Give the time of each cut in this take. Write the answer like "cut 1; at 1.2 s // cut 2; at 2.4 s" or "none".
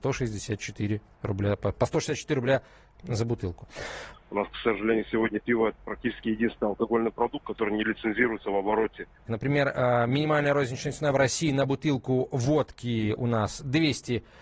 cut 1; at 4.1 s // cut 2; at 9.3 s